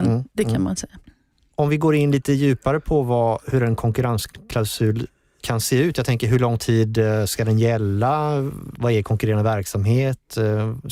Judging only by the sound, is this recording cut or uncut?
uncut